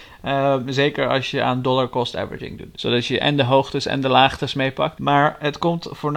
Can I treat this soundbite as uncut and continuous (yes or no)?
no